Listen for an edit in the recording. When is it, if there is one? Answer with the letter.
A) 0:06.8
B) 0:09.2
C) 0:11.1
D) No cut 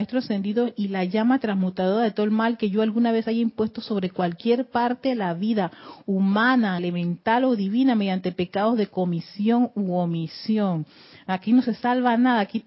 A